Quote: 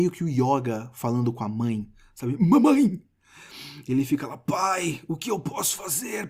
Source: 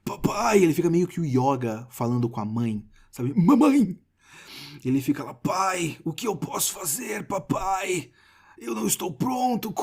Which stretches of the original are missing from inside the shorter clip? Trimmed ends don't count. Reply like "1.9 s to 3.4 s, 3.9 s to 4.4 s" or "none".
none

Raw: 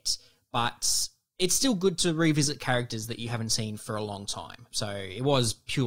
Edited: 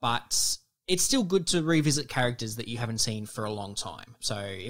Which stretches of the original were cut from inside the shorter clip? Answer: none

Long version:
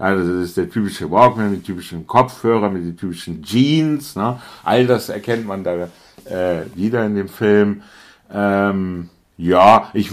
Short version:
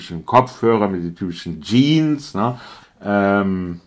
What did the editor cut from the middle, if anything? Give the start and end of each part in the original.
4.6 s to 8.1 s

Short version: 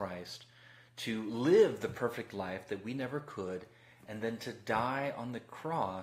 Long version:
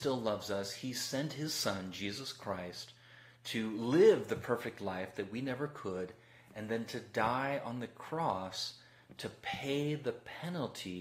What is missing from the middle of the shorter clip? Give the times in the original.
none

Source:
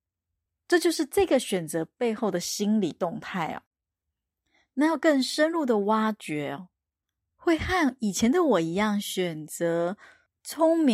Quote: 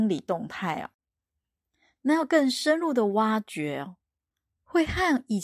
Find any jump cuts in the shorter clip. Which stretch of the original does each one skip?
none

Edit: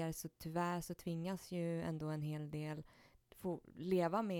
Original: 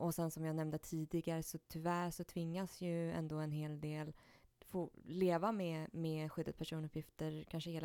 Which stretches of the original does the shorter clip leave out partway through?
none

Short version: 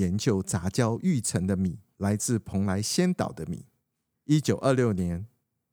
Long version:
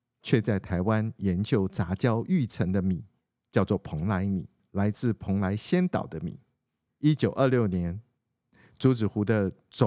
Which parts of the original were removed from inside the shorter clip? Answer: 3.2 s to 4.7 s

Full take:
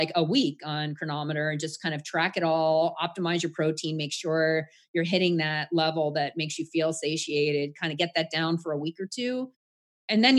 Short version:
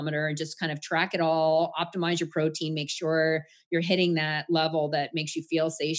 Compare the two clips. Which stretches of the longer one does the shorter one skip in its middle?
none

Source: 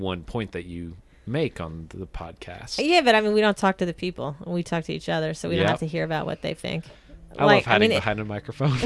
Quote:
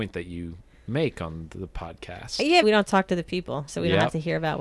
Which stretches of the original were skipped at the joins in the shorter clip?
3.0 s to 3.3 s, 4.4 s to 5.3 s

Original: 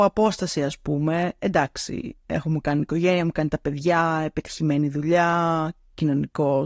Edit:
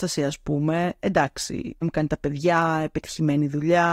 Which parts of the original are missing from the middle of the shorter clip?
2.2 s to 3.2 s

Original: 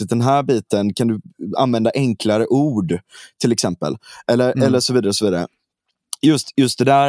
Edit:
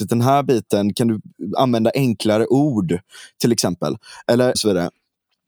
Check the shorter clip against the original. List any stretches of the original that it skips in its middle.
4.5 s to 5.1 s

